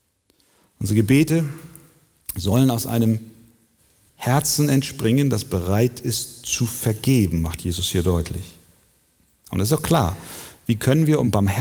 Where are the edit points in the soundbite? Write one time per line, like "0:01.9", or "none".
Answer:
none